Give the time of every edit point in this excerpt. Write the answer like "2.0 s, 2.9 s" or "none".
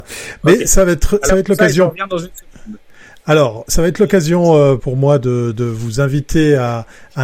4.8 s

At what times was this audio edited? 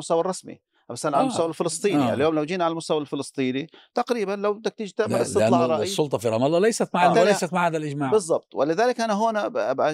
7.1 s

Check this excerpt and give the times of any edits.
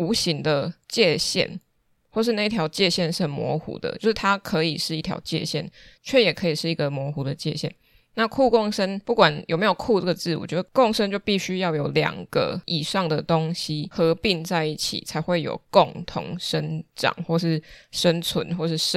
none

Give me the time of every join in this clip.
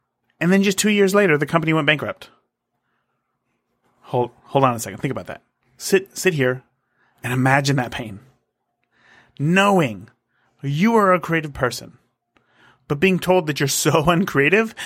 none

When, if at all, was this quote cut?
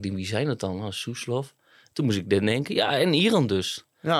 none

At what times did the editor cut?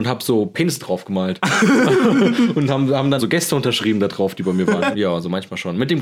3.2 s, 4.9 s

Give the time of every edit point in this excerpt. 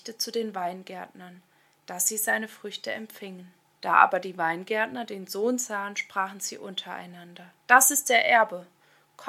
3.8 s, 7.6 s

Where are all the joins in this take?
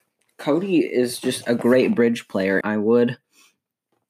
2.6 s

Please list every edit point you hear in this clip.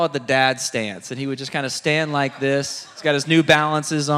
none

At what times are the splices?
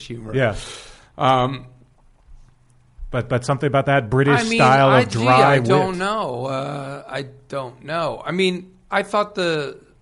none

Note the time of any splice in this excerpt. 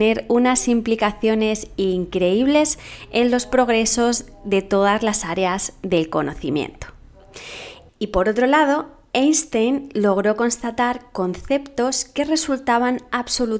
7.9 s

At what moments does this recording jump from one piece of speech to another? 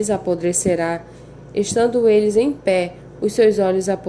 none

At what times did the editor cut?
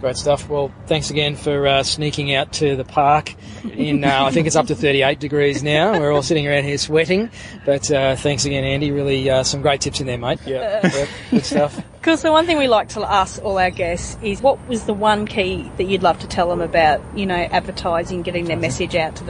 10.4 s, 14.4 s

